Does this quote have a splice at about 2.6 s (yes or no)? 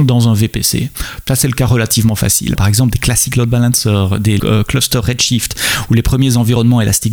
yes